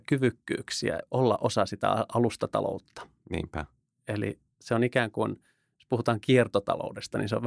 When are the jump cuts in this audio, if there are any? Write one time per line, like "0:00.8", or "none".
0:01.0